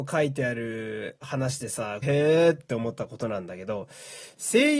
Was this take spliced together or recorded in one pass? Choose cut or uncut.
cut